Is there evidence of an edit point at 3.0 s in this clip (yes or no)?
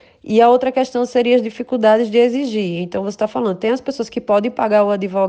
no